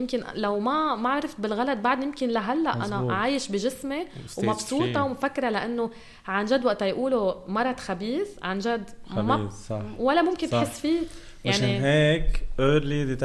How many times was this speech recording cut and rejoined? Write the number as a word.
zero